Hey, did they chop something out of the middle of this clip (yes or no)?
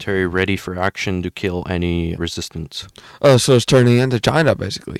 yes